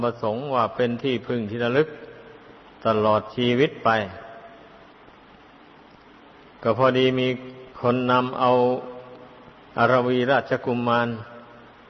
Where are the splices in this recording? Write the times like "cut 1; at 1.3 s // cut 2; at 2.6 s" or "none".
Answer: cut 1; at 7.7 s

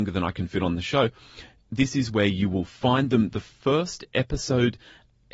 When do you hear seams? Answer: none

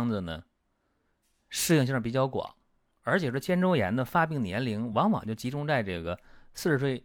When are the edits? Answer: none

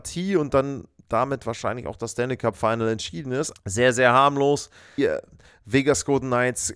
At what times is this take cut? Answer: cut 1; at 3.5 s // cut 2; at 5.0 s

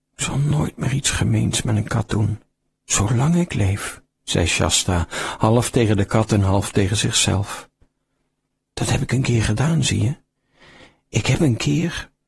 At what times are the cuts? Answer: none

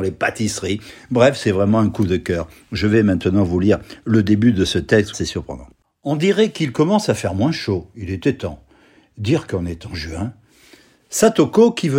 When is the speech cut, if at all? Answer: cut 1; at 5.1 s

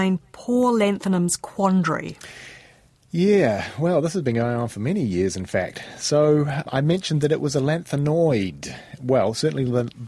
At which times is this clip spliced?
none

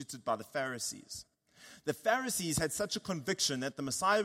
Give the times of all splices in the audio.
none

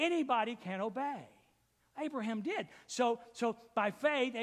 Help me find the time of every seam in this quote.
none

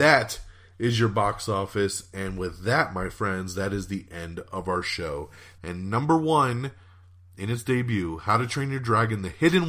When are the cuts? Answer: cut 1; at 5.6 s

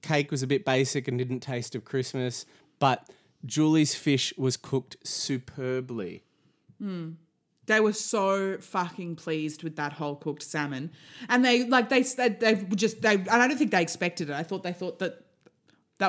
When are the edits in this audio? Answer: none

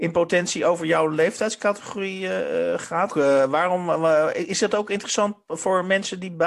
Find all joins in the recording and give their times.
cut 1; at 3.1 s

